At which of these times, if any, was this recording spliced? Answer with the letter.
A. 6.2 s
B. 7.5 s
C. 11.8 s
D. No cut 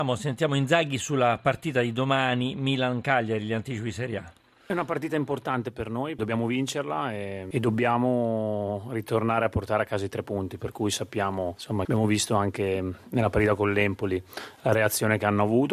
C